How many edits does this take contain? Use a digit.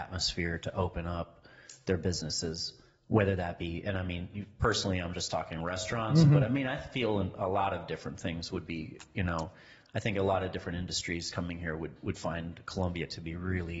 0